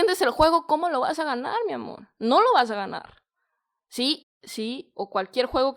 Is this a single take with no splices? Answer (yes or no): no